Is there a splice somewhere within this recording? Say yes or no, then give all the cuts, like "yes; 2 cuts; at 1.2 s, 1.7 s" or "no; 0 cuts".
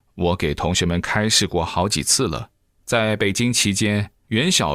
yes; 1 cut; at 2.6 s